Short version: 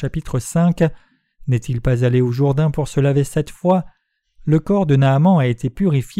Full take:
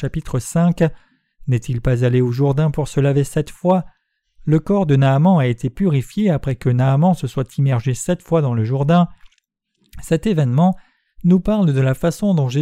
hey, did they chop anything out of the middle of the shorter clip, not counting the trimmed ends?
no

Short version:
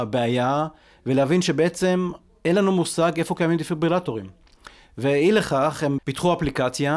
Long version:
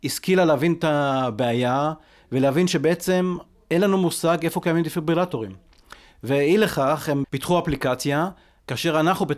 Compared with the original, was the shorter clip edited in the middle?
no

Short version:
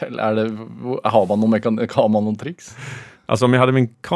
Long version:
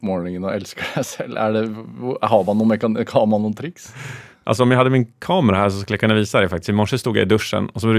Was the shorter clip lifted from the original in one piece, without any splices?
yes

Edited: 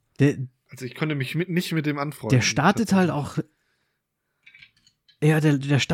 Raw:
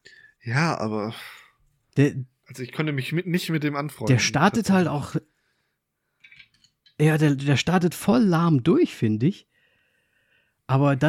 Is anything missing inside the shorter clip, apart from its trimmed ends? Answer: no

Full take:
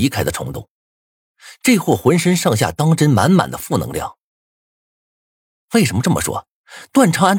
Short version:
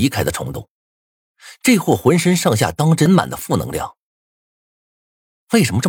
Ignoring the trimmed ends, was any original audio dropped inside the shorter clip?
yes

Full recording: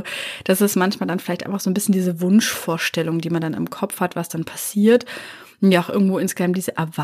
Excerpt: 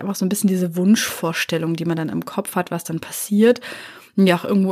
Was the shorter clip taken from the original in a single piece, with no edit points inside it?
yes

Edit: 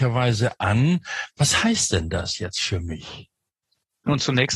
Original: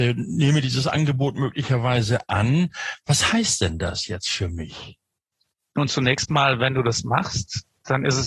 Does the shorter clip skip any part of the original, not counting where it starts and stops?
no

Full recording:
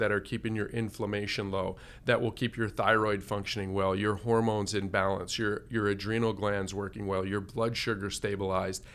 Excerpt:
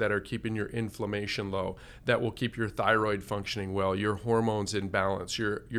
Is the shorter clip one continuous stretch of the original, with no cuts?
yes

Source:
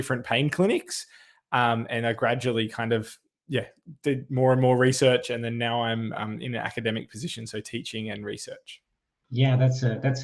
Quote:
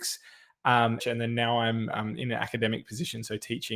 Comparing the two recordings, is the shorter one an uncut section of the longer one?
no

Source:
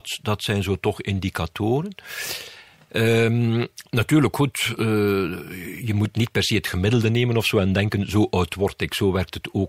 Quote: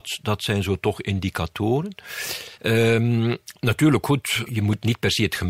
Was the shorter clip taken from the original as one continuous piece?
no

